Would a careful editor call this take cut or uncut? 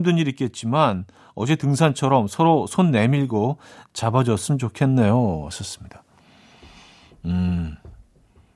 uncut